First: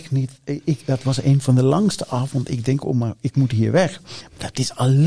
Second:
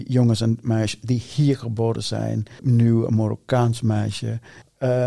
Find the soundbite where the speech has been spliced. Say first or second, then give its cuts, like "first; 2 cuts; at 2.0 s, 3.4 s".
second; 1 cut; at 2.6 s